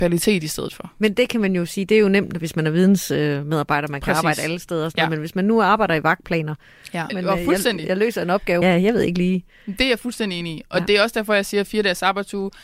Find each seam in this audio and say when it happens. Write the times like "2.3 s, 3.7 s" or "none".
7.1 s, 8.6 s

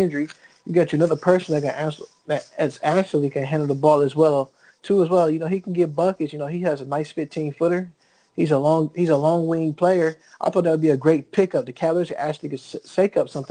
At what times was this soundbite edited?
none

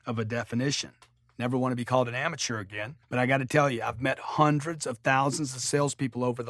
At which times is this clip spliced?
3.0 s

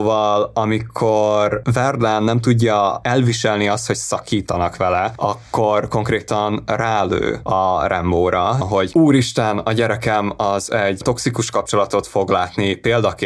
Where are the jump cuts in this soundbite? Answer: 8.6 s

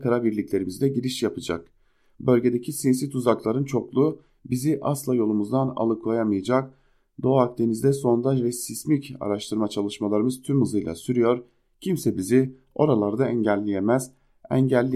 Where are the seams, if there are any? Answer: none

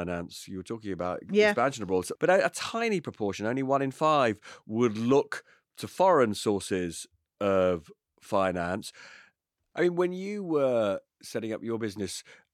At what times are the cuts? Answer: 2.2 s, 9.7 s

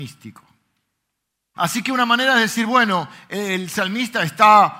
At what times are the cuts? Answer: 1.5 s

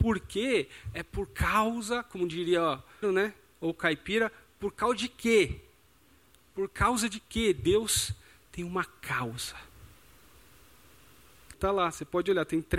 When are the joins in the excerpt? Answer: 3.0 s, 11.5 s

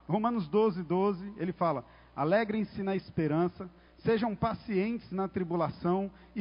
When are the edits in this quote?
none

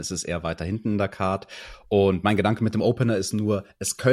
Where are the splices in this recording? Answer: none

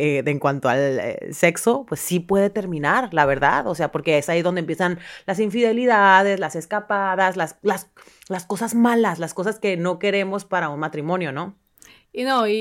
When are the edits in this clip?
none

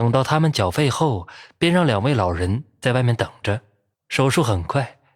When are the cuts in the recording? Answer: 3.9 s

